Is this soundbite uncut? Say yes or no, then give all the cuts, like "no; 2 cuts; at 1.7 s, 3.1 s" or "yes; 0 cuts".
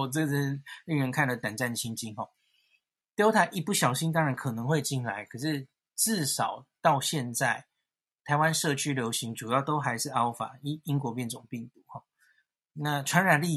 yes; 0 cuts